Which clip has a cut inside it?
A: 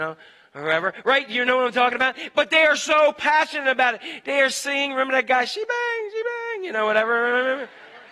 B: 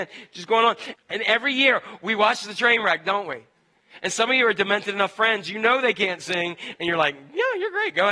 B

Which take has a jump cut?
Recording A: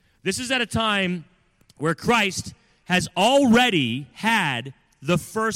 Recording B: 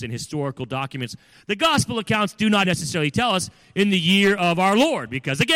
B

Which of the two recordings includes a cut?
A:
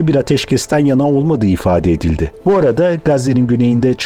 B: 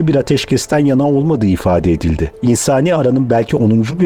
A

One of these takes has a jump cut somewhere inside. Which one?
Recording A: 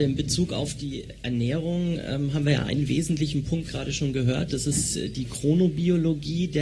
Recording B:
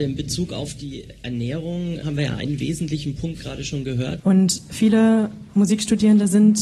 B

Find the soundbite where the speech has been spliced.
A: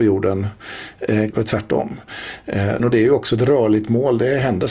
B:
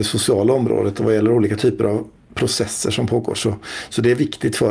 A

